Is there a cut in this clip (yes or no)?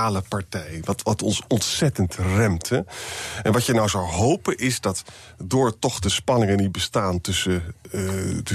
no